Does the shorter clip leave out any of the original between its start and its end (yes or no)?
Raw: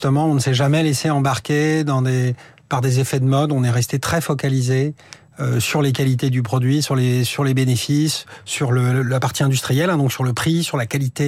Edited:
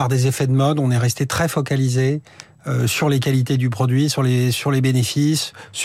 no